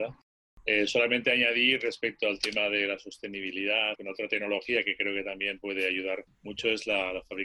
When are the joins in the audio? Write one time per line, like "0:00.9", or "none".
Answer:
0:03.9